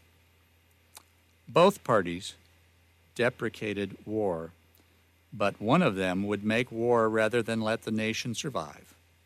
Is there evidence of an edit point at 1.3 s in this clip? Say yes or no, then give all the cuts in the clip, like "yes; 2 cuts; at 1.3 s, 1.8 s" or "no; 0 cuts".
no; 0 cuts